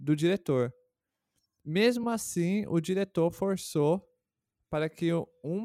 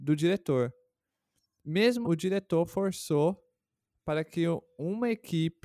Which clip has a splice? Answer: second; 1 cut; at 2.0 s

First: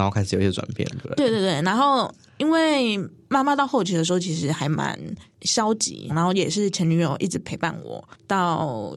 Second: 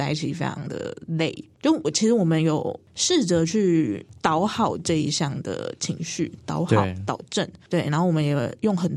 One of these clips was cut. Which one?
first; 1 cut; at 6.1 s

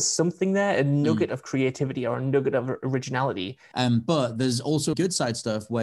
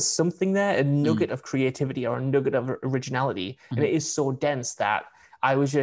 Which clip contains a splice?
first; 2 cuts; at 3.7 s, 4.9 s

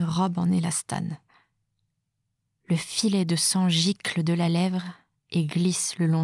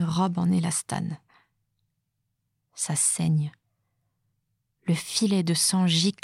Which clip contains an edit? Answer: first; 1 cut; at 2.6 s

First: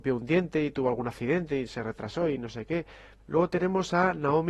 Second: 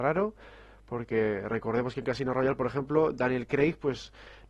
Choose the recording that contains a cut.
first; 1 cut; at 3.2 s

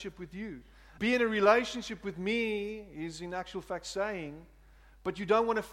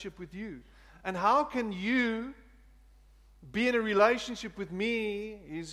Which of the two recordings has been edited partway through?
first; 1 cut; at 1.0 s

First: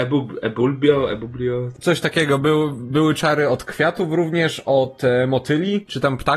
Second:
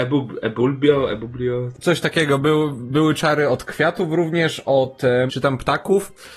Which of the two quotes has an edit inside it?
second; 1 cut; at 5.3 s

